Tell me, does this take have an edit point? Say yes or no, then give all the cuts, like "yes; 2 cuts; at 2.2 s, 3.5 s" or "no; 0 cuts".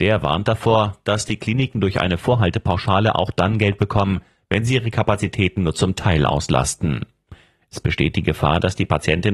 no; 0 cuts